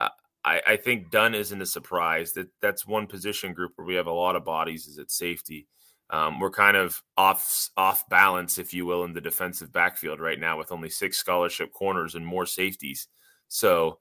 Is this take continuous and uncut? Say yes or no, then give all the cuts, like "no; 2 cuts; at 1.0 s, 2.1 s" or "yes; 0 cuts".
no; 1 cut; at 7.1 s